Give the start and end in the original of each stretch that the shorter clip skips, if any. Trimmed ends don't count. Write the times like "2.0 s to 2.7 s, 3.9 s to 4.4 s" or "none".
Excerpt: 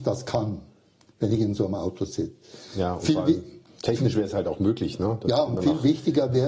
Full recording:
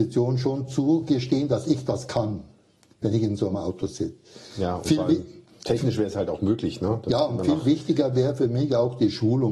none